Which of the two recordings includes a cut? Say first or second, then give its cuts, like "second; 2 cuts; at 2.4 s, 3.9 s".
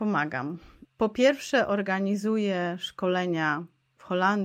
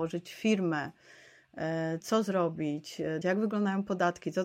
second; 2 cuts; at 2.0 s, 3.2 s